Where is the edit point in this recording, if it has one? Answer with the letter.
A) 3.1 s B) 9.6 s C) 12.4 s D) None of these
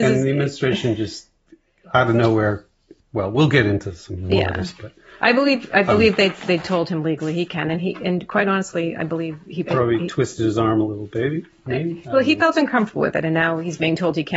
B